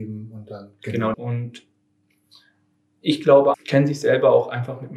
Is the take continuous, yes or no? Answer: no